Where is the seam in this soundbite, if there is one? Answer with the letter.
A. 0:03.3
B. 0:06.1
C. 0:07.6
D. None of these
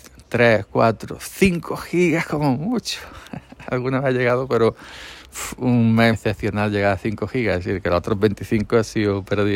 B